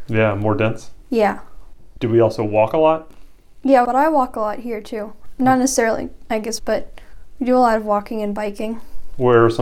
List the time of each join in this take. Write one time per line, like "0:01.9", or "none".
0:03.8
0:06.6